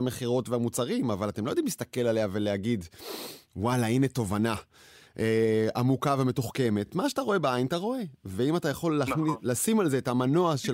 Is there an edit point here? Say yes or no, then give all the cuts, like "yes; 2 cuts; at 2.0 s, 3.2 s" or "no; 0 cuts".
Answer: no; 0 cuts